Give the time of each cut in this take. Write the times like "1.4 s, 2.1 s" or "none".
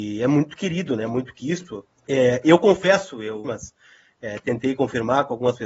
1.9 s, 3.4 s